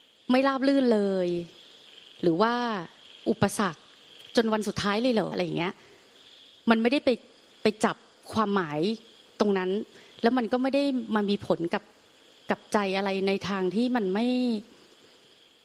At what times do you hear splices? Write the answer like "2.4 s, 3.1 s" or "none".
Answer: 5.3 s